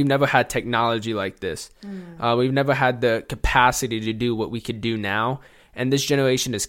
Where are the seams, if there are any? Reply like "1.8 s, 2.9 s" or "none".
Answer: none